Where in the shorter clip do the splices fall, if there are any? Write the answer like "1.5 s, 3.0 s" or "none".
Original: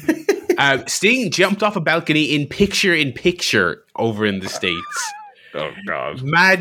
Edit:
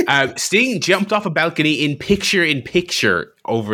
none